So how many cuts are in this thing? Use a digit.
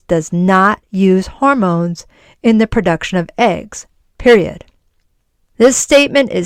1